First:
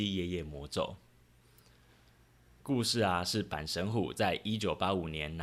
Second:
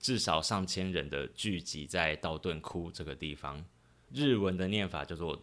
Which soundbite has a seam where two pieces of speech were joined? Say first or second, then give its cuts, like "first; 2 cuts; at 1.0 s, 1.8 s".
second; 1 cut; at 4.1 s